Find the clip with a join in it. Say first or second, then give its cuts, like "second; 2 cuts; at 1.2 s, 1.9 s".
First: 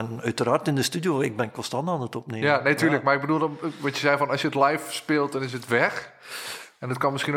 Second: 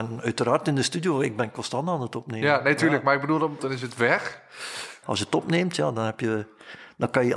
second; 2 cuts; at 3.6 s, 5.0 s